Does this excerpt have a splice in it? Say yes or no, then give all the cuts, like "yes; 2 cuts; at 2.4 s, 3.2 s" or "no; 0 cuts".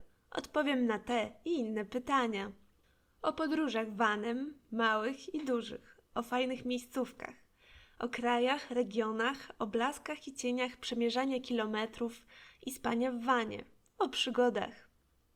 no; 0 cuts